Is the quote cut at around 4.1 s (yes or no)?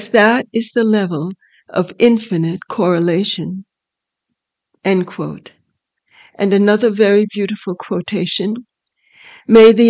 no